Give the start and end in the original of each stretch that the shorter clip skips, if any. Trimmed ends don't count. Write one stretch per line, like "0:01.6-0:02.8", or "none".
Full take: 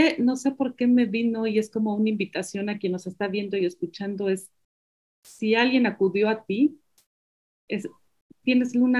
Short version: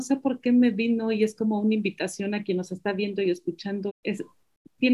0:04.2-0:07.5